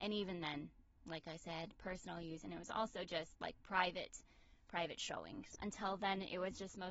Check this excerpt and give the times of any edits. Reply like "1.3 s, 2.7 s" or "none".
5.6 s